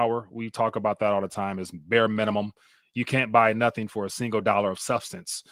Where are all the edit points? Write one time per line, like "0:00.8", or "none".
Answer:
none